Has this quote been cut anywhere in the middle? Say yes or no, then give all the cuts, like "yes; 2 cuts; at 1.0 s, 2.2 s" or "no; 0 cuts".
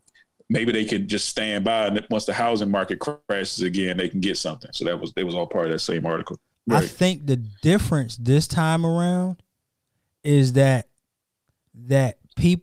yes; 1 cut; at 6.5 s